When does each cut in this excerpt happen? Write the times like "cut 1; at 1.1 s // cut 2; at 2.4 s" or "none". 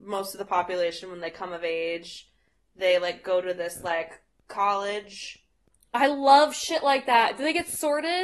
none